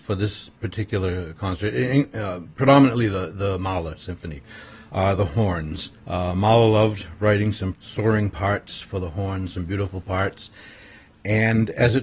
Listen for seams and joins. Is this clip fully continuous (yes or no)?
no